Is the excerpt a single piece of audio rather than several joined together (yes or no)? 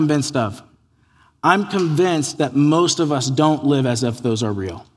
yes